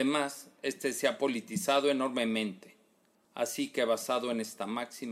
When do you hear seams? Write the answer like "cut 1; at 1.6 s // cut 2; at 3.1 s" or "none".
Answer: cut 1; at 3.2 s